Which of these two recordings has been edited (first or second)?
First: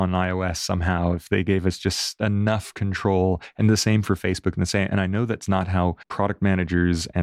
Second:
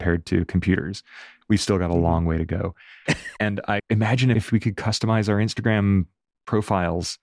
second